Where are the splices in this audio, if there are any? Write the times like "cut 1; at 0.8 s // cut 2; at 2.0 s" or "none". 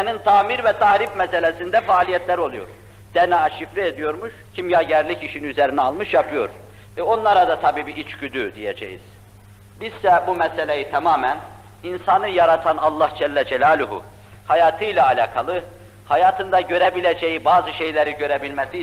cut 1; at 4.4 s // cut 2; at 6.9 s